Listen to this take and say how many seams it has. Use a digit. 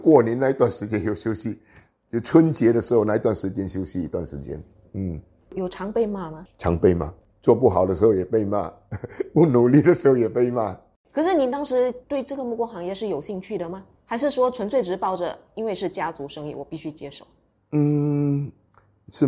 0